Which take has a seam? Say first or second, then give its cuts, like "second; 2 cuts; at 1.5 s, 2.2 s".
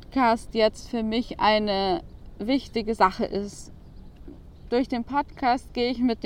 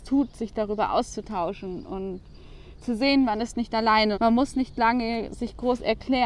second; 1 cut; at 4.1 s